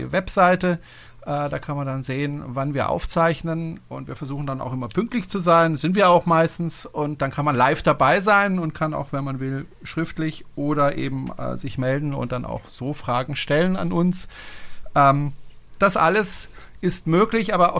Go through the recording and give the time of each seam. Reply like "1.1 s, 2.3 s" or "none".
none